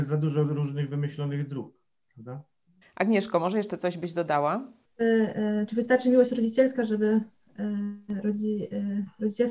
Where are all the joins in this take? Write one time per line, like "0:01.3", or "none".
0:02.8

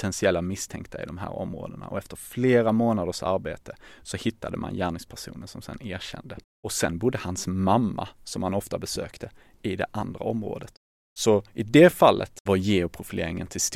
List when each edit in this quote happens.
0:06.4

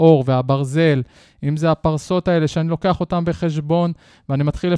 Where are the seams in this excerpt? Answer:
none

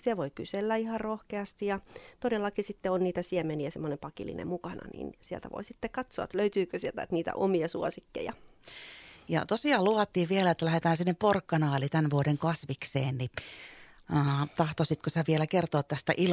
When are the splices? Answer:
none

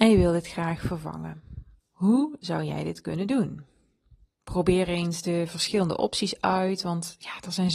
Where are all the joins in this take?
0:01.8

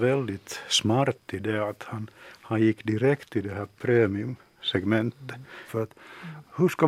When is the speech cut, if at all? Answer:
0:05.7

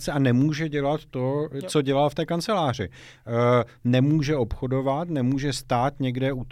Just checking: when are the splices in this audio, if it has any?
none

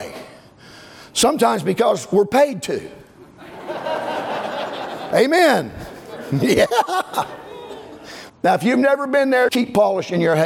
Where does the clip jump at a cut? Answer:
0:08.3
0:09.5

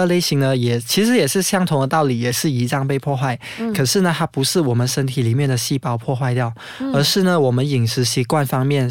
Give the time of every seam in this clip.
none

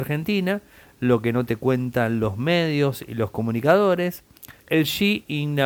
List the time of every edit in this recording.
0:04.6

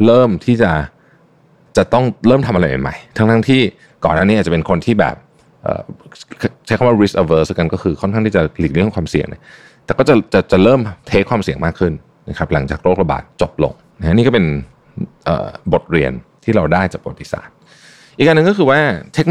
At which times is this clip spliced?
0:13.3

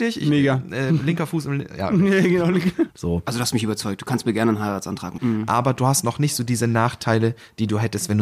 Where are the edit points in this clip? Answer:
0:02.9
0:05.2

